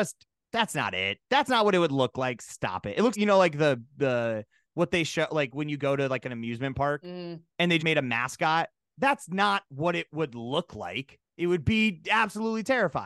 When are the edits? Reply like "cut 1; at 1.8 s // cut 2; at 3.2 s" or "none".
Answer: cut 1; at 3.1 s // cut 2; at 7.8 s